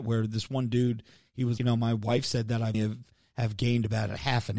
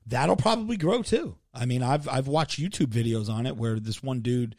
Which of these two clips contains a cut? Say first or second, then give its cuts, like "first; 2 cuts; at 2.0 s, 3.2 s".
first; 2 cuts; at 1.6 s, 2.7 s